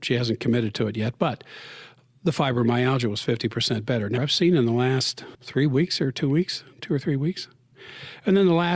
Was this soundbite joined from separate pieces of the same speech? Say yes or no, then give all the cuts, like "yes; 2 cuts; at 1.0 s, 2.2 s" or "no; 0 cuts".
yes; 2 cuts; at 4.2 s, 5.3 s